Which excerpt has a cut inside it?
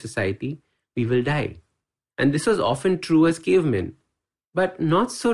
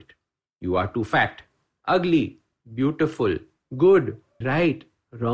second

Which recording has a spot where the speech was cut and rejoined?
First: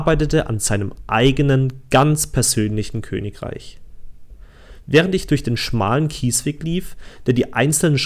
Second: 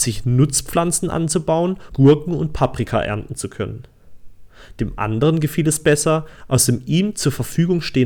second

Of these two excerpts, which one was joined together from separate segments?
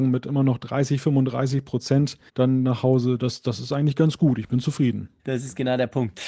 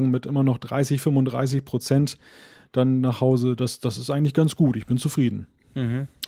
first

